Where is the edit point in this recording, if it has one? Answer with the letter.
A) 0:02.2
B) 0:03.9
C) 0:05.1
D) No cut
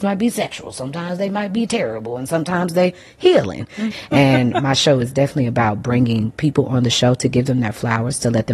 B